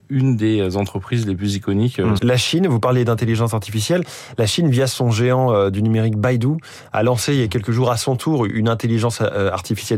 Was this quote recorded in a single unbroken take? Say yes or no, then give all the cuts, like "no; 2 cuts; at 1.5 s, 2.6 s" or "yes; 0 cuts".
no; 1 cut; at 2.2 s